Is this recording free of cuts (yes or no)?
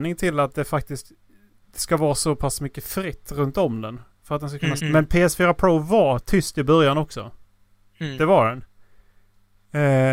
no